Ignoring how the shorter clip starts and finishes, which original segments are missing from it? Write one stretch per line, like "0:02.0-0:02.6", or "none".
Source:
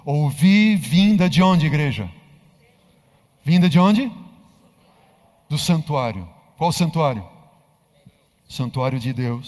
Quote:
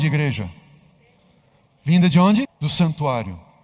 0:04.0-0:05.3